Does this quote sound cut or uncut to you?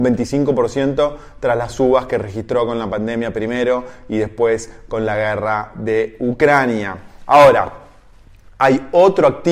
uncut